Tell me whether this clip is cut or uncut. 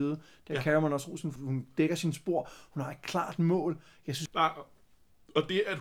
cut